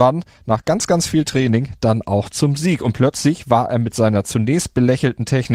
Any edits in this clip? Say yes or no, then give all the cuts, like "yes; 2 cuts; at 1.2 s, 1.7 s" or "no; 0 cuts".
no; 0 cuts